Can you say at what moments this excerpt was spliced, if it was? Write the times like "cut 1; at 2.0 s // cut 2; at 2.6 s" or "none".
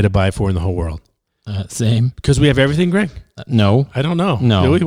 none